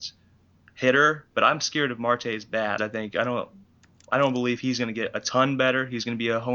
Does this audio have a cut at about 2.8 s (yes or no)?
yes